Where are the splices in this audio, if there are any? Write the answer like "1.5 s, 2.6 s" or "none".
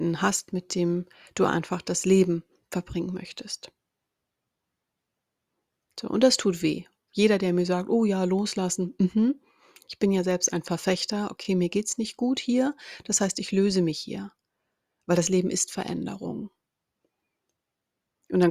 none